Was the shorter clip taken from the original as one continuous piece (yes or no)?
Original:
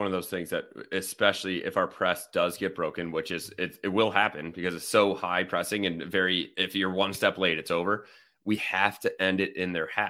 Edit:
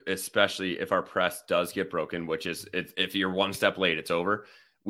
no